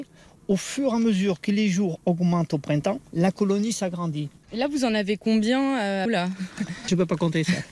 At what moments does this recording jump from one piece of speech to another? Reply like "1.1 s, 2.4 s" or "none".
4.4 s, 6.1 s